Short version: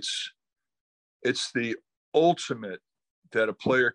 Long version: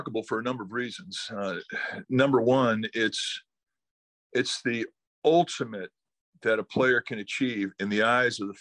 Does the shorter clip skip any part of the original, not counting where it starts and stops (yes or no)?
no